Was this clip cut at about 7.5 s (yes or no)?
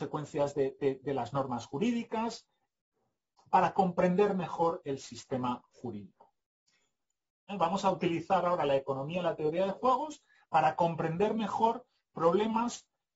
yes